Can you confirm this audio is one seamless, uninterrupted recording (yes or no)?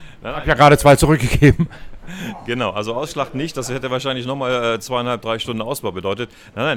yes